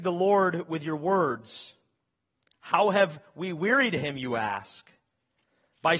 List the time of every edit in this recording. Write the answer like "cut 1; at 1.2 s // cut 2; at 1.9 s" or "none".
none